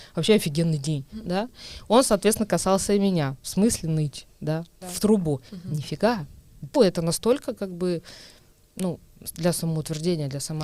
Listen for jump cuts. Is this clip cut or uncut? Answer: cut